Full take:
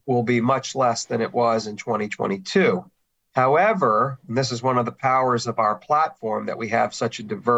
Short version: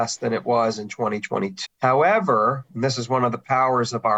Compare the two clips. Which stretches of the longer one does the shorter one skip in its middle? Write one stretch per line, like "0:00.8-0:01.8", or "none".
0:02.5-0:03.2

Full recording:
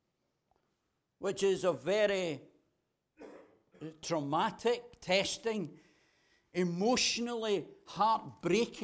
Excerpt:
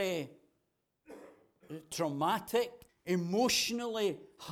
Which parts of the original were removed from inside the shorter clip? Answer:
0:05.0-0:06.4

